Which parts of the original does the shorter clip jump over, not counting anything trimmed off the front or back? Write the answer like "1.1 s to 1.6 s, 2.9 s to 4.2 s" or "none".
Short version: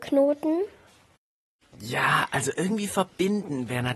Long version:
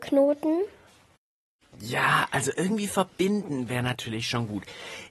none